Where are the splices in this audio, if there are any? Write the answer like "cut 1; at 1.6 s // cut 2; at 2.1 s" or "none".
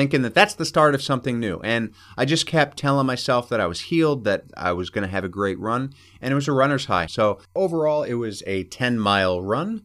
cut 1; at 7.1 s